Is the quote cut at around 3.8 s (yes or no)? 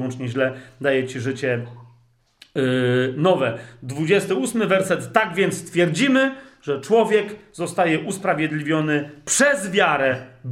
no